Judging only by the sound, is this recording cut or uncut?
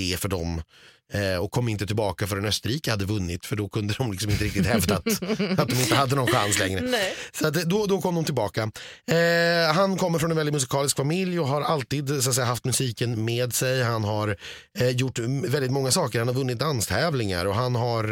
uncut